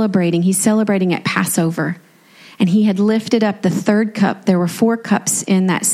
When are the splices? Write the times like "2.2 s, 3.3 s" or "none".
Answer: none